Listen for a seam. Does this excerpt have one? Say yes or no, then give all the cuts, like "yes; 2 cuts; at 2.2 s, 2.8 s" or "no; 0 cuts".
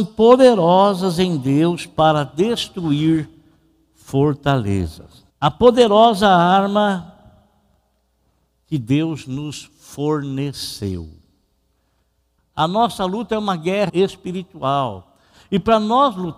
yes; 3 cuts; at 5.3 s, 12.4 s, 13.9 s